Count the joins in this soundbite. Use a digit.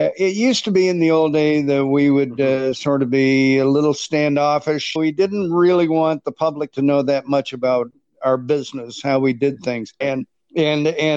2